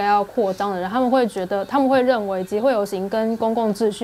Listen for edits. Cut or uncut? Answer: uncut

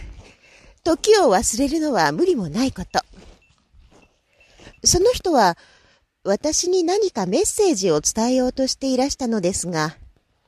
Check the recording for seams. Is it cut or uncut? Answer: cut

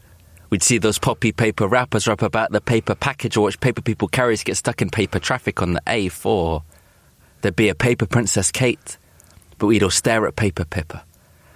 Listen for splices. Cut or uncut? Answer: cut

